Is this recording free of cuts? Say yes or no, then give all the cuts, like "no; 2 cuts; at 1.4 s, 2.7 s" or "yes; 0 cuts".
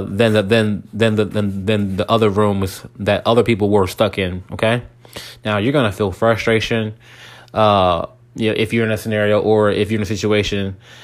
yes; 0 cuts